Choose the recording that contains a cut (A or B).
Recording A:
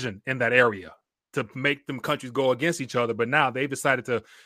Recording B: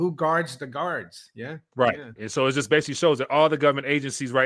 B